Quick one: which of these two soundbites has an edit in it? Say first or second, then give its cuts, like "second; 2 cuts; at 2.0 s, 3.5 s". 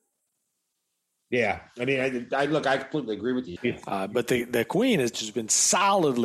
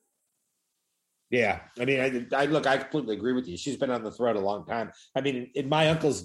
first; 2 cuts; at 3.6 s, 5.1 s